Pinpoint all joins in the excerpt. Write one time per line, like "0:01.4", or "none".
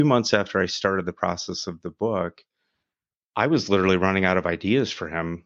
none